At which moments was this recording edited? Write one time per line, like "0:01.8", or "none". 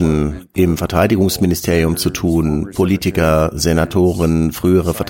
none